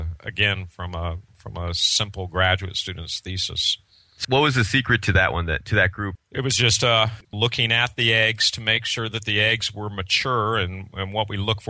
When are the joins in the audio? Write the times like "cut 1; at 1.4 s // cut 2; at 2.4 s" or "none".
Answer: cut 1; at 4.2 s // cut 2; at 6.2 s // cut 3; at 7.2 s